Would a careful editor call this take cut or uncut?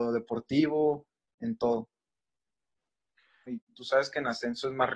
cut